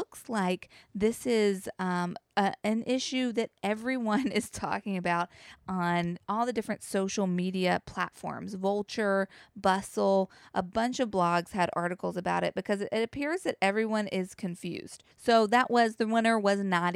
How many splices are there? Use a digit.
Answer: 1